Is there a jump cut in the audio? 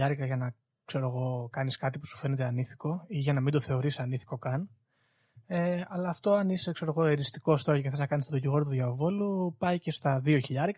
no; 0 cuts

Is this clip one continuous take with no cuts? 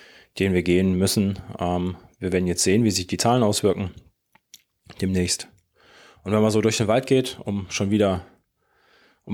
yes; 0 cuts

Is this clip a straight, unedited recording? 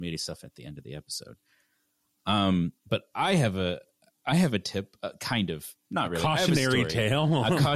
yes; 0 cuts

